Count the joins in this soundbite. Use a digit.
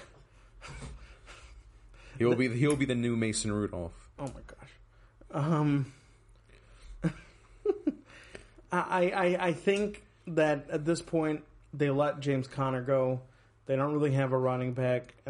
0